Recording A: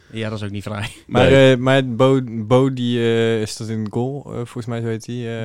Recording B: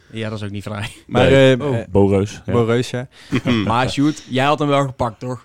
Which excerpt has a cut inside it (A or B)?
B